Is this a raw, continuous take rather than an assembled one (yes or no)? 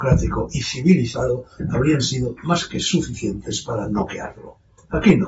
yes